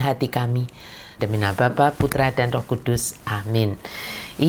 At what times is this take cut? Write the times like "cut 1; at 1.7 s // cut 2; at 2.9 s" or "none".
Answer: cut 1; at 1.2 s